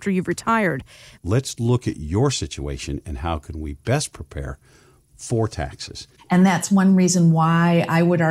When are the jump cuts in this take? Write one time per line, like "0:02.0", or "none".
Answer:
0:01.2
0:06.2

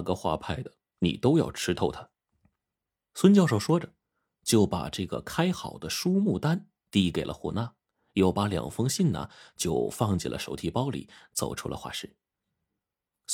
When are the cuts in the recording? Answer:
0:02.3

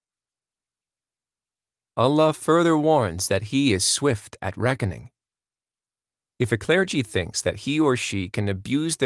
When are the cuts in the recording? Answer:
none

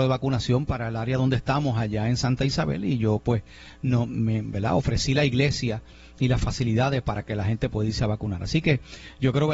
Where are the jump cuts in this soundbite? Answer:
none

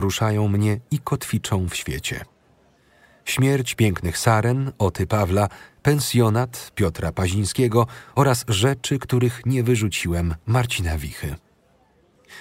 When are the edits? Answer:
none

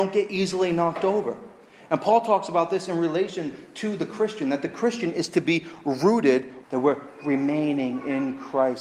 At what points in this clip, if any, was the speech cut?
0:06.6

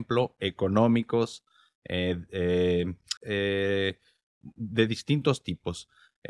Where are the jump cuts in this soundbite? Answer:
0:03.2

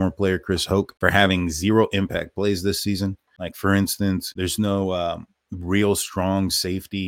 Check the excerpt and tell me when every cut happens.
0:03.3

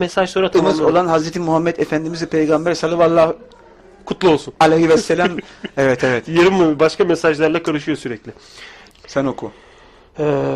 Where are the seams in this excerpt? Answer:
0:08.9

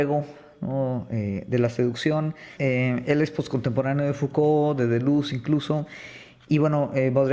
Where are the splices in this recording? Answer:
0:02.6

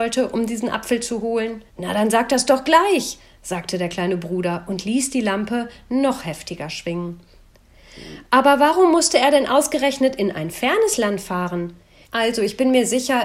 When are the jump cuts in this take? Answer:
0:01.7
0:12.0

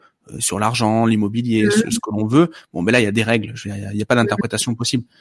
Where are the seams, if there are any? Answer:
none

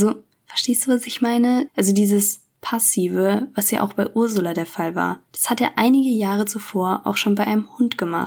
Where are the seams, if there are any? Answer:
0:01.7
0:05.3

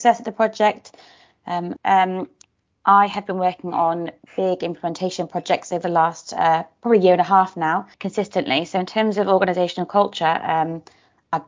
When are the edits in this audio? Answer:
0:01.8
0:07.9

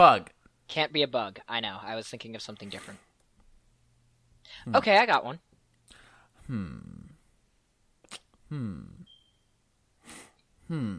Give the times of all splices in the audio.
none

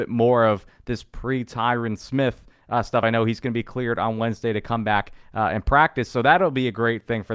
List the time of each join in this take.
none

